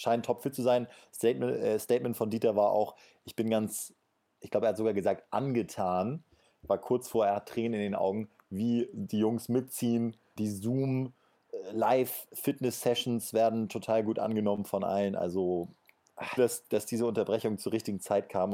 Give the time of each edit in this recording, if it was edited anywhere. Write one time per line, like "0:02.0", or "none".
0:10.4
0:16.4